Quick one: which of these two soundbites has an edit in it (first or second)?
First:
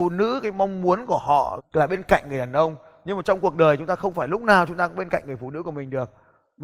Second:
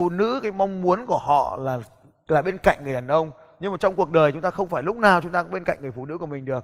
first